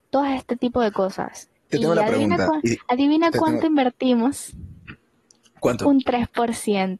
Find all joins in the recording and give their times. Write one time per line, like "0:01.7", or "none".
none